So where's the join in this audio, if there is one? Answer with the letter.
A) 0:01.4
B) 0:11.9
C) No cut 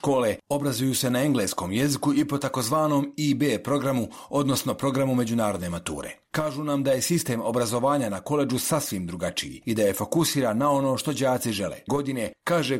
B